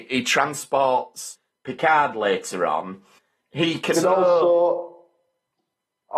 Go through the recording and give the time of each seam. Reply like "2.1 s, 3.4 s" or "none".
3.9 s